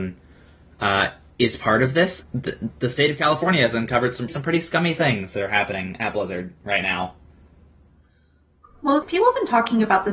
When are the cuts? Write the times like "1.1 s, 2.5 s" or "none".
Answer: 2.2 s, 4.3 s, 9.0 s